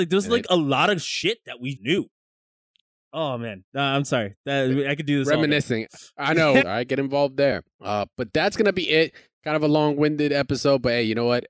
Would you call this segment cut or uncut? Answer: cut